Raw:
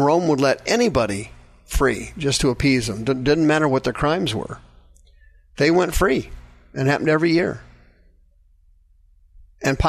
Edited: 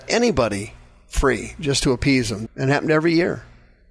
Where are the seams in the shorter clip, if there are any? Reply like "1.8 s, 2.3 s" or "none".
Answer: 2.5 s